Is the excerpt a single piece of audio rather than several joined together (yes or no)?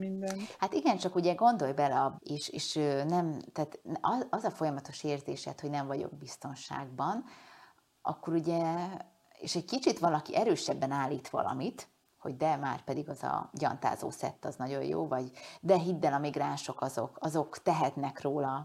no